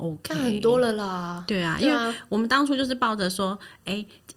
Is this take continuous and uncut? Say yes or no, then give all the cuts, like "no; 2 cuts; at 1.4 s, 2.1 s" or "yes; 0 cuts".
yes; 0 cuts